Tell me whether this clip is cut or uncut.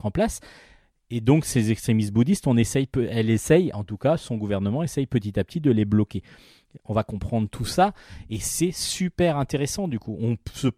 uncut